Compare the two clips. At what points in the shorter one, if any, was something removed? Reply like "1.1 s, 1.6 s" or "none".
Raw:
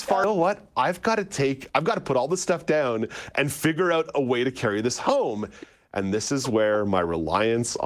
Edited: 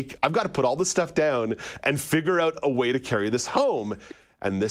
none

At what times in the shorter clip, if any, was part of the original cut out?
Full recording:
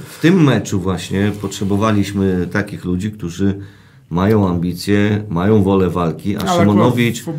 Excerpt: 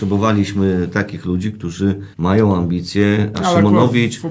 2.1 s, 3.3 s

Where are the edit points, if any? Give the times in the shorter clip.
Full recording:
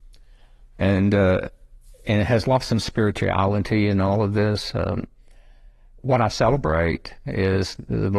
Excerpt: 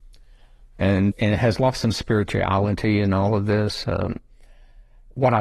1.1 s

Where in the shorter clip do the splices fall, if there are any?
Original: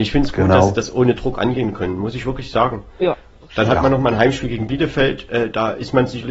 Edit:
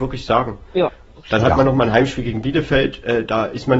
none

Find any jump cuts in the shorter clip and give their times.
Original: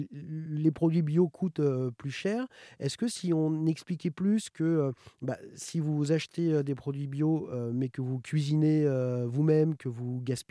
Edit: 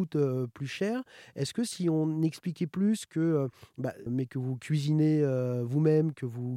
4.1 s

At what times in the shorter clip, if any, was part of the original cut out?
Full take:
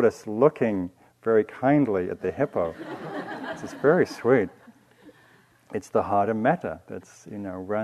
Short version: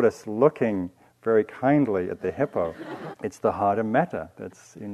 3.1 s

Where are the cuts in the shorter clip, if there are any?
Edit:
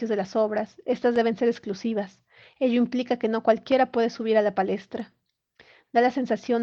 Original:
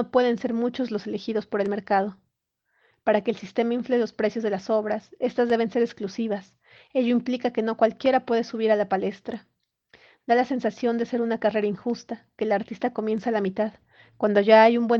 none

